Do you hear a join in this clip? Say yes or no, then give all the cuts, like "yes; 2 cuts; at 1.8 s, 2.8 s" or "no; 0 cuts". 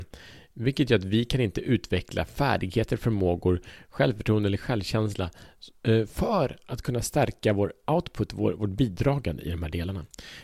no; 0 cuts